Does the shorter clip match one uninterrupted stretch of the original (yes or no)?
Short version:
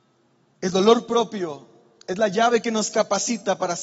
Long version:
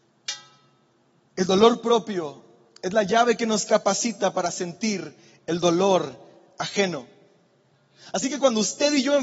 yes